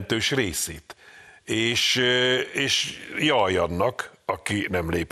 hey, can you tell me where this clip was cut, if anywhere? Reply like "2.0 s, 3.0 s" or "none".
none